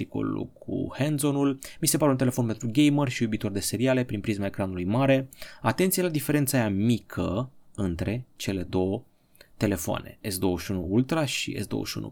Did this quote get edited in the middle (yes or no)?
no